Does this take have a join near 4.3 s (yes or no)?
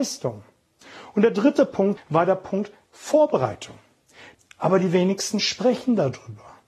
yes